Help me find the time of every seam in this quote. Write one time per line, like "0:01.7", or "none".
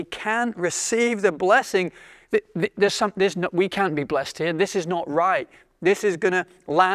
none